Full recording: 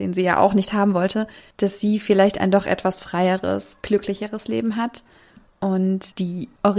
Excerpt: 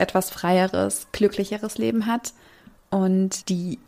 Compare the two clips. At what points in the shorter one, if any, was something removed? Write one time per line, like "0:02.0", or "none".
none

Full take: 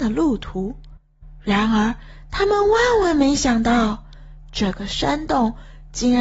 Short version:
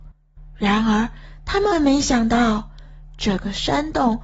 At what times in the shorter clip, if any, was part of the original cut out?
0:01.7

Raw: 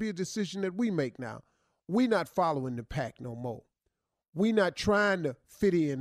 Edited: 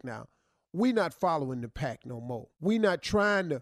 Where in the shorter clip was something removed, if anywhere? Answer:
0:02.5

